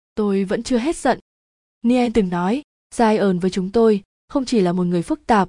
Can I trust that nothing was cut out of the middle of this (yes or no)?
yes